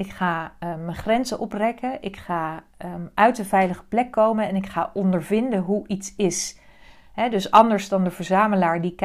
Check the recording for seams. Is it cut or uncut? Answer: uncut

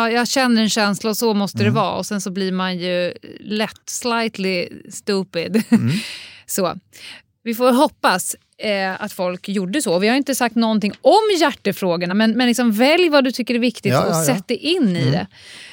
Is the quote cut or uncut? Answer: uncut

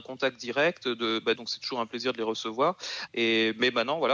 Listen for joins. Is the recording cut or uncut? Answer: cut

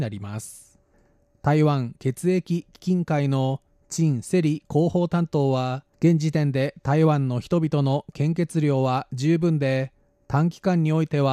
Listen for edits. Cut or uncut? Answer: cut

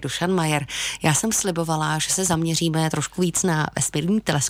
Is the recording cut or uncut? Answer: uncut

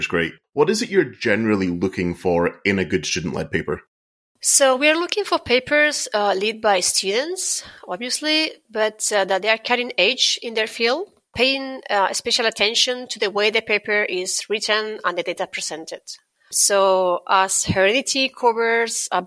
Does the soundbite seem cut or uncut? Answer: uncut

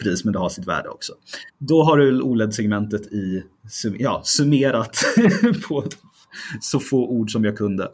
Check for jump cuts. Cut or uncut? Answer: cut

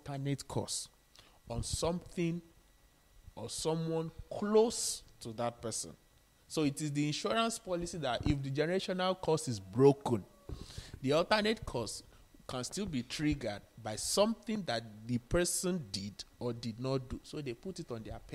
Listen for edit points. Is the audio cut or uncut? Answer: uncut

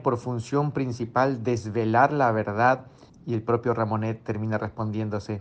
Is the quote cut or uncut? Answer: cut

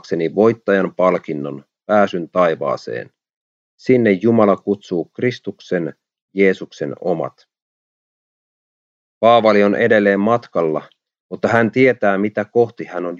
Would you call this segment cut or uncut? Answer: uncut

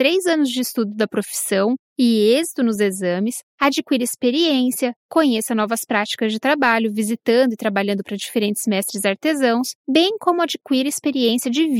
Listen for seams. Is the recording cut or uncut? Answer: uncut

